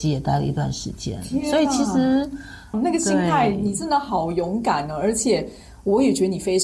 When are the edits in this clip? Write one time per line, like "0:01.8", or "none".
0:02.7